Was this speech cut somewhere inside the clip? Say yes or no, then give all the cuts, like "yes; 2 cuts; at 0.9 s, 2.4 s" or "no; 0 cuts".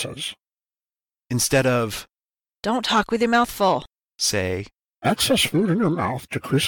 yes; 1 cut; at 1.1 s